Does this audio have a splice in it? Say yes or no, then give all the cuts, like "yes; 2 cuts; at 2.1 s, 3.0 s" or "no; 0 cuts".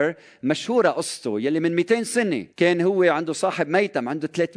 yes; 1 cut; at 2.5 s